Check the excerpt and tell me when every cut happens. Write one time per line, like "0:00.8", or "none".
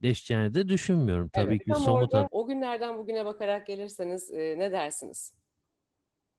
0:02.3